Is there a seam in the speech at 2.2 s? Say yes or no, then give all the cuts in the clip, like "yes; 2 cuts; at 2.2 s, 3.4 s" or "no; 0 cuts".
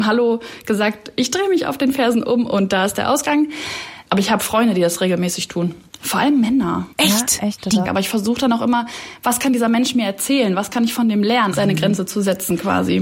no; 2 cuts; at 7.8 s, 11.5 s